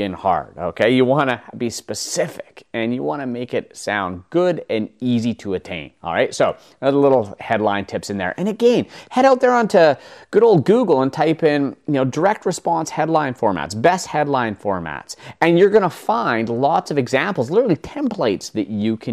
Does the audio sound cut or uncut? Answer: uncut